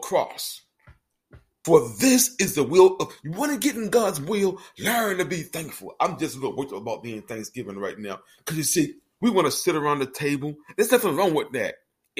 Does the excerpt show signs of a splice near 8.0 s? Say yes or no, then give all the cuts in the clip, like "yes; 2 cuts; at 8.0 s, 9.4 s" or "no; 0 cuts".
no; 1 cut; at 1.6 s